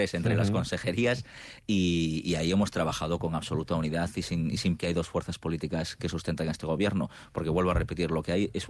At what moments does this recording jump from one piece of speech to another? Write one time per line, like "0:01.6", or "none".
0:04.8